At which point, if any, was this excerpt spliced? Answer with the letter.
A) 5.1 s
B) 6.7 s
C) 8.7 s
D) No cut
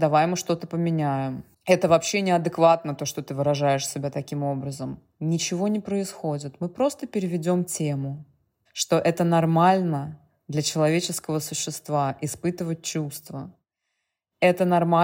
C